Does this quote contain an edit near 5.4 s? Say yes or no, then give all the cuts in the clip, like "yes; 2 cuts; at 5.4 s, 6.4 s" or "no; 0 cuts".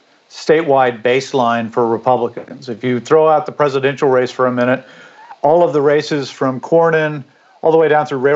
no; 0 cuts